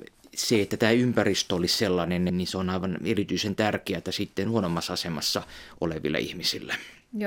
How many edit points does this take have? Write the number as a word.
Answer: one